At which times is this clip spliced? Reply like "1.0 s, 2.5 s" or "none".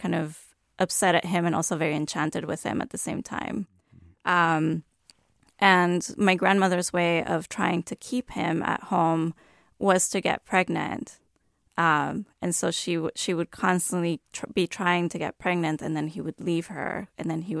none